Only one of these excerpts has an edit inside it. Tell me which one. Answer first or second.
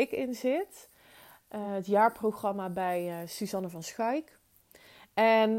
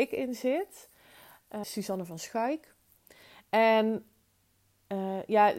second